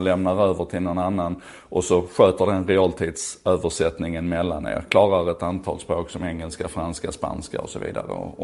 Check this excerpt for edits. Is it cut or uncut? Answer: uncut